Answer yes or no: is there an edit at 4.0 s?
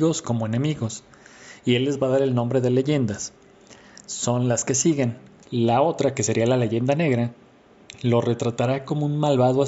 no